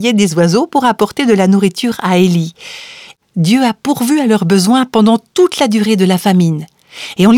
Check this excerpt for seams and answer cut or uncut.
cut